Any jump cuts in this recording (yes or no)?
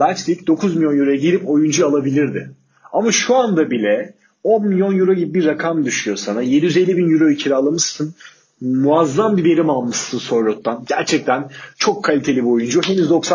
no